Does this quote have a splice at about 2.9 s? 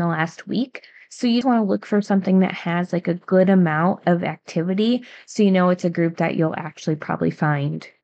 no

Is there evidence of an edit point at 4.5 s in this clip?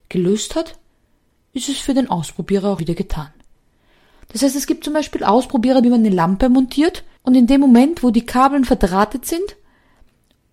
no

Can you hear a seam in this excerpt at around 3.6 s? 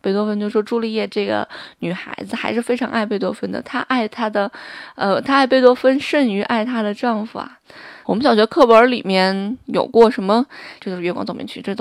no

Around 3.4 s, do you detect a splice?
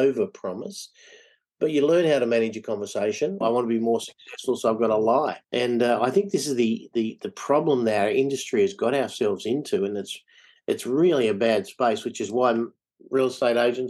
yes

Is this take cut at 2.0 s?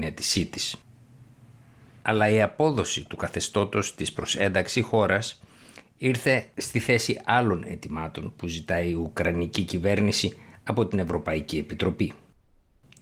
yes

